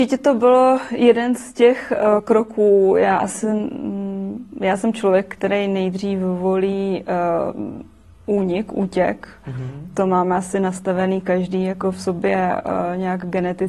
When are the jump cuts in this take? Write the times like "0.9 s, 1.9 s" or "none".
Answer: none